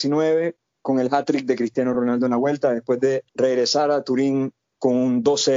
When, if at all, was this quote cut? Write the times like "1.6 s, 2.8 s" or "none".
3.3 s

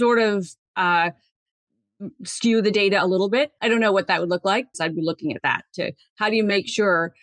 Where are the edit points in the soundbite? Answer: 3.6 s, 4.7 s

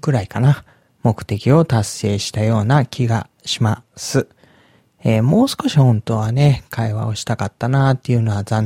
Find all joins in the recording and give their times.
none

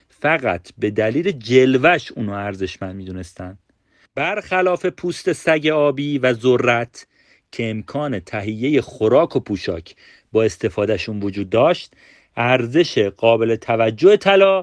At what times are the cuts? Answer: 4.1 s

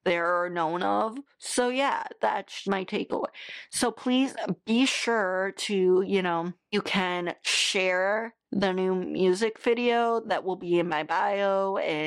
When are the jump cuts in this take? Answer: 2.6 s, 8.4 s

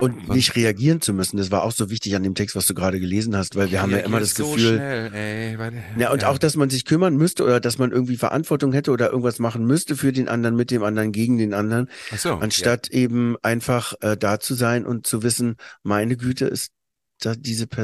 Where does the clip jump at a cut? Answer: 14.0 s

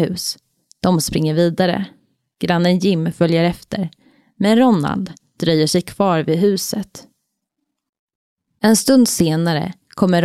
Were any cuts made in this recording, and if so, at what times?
none

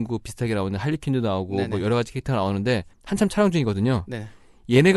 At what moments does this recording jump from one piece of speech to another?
2.9 s

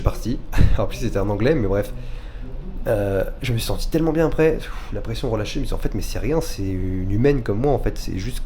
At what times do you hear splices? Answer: none

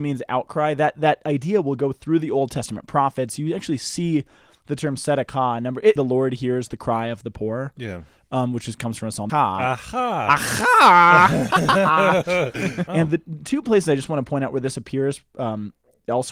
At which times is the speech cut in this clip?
6.0 s, 9.3 s, 12.9 s

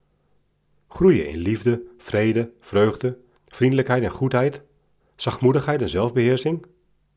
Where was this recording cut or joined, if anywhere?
3.3 s, 5.0 s

